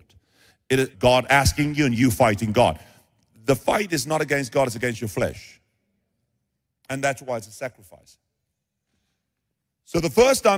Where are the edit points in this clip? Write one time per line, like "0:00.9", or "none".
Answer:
0:00.9